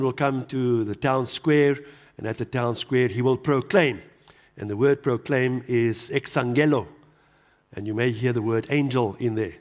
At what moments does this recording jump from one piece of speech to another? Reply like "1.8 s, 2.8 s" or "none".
none